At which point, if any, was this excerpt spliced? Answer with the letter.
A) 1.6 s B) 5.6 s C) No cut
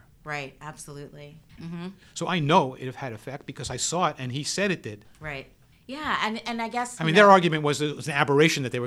A